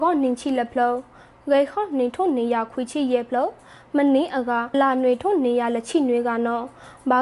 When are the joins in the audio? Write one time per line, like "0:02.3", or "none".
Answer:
0:04.7